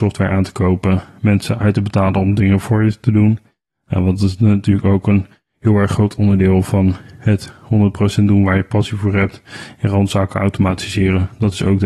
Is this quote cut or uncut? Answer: uncut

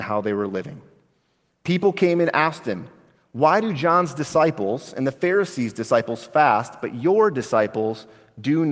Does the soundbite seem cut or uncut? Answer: cut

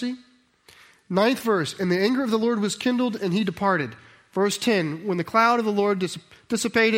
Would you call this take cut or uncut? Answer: uncut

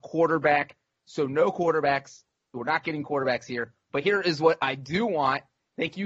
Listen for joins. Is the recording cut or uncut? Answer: uncut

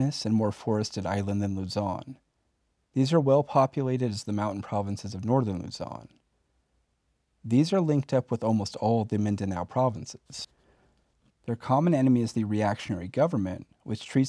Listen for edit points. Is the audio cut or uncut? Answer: cut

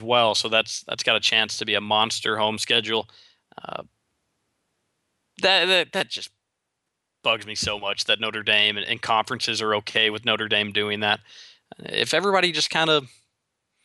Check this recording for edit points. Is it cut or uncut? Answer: uncut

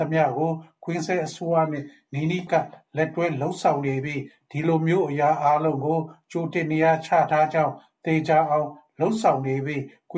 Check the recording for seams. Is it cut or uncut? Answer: cut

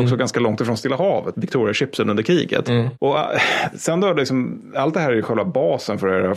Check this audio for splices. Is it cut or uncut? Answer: cut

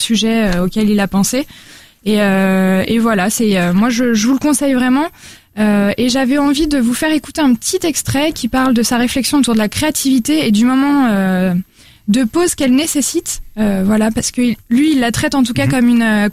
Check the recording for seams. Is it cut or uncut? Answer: uncut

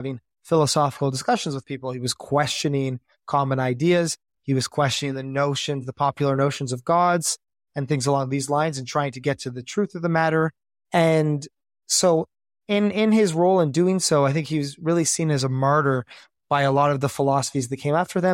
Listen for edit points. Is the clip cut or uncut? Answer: uncut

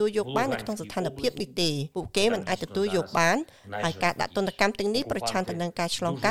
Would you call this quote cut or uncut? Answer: cut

